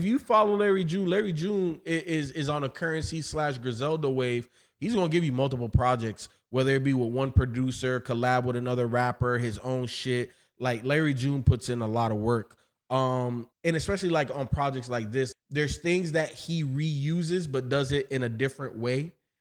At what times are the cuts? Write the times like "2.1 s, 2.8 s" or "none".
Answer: 13.5 s, 15.3 s